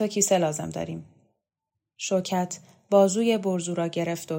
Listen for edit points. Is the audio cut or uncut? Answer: uncut